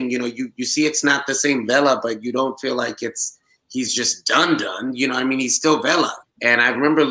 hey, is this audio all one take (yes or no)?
no